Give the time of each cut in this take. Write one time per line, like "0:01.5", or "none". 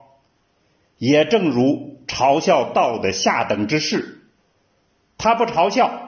none